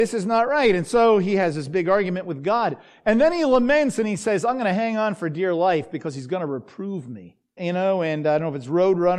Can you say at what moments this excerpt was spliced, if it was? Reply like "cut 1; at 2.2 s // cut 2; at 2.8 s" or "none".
cut 1; at 7.6 s